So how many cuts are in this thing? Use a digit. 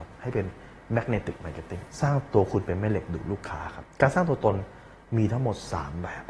1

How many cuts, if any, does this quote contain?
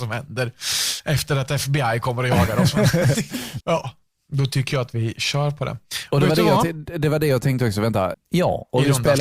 2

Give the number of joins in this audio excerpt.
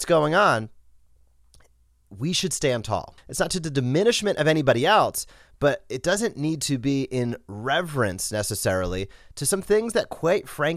1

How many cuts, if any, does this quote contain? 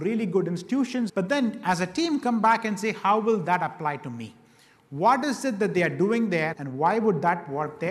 2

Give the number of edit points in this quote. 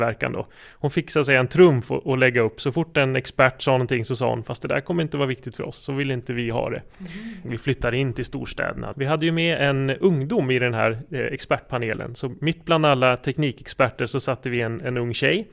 2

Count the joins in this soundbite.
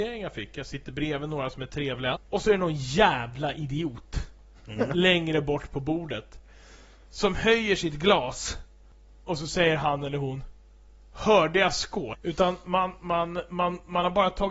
2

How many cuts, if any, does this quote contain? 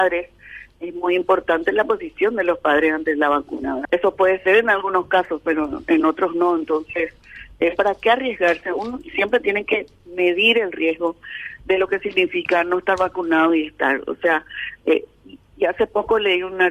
1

